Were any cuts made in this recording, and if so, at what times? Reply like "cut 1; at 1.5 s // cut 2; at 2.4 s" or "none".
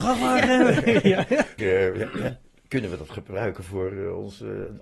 cut 1; at 1.6 s